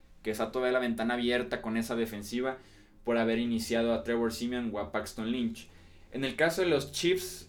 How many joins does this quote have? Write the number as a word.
zero